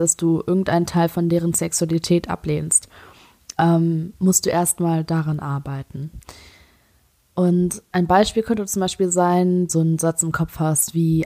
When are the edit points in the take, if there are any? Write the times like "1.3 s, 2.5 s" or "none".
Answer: 9.7 s

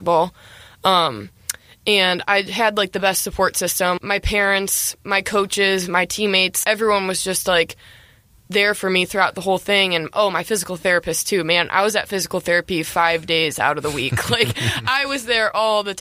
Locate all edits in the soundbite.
4.0 s, 6.6 s

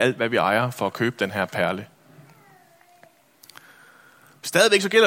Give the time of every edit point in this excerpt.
none

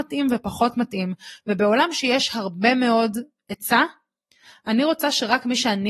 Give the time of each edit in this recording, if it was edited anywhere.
none

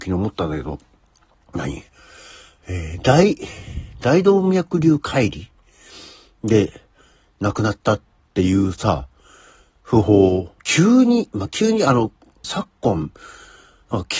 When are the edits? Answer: 10.6 s, 12.4 s

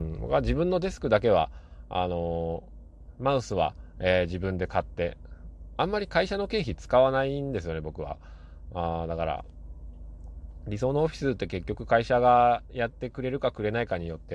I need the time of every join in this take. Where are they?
none

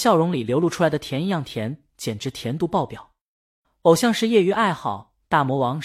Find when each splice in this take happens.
3.6 s

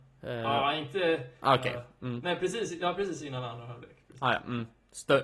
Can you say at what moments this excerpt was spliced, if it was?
1.4 s

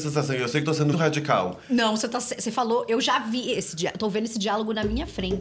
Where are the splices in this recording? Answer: 0.9 s

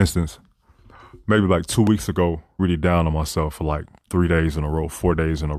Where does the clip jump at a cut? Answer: 2.6 s

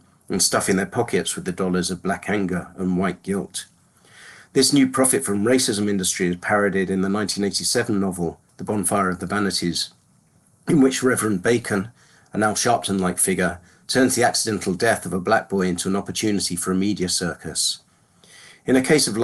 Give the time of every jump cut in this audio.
none

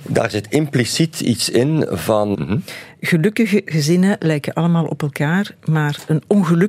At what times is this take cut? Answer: 2.3 s

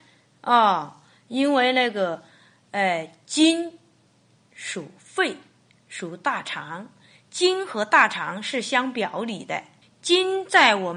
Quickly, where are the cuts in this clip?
9.8 s

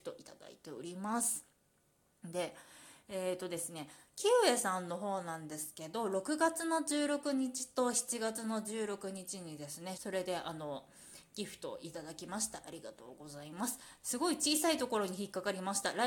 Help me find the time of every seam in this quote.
9.9 s, 14.0 s

